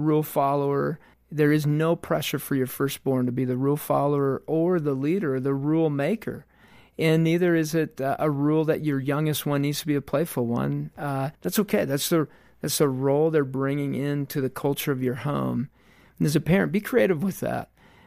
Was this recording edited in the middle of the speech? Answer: yes; 2 cuts; at 1.1 s, 11.4 s

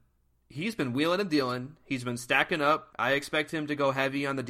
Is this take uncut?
no; 1 cut; at 2.9 s

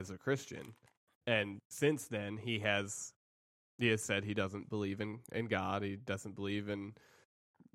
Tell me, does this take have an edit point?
no; 0 cuts

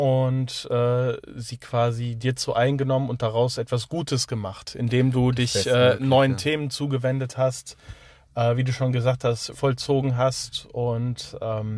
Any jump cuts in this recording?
yes; 1 cut; at 9.5 s

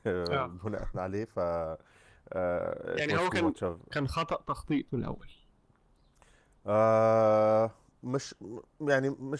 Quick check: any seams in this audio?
no; 0 cuts

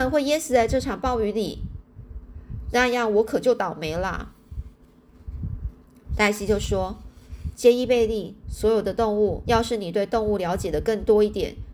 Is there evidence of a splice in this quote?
yes; 2 cuts; at 8.4 s, 9.4 s

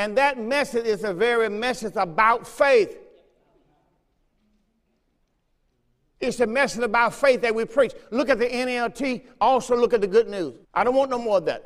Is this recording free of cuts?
no; 1 cut; at 10.6 s

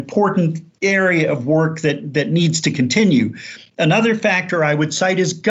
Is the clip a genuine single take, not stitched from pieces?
yes; 0 cuts

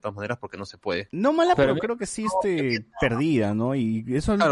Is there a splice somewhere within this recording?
no; 0 cuts

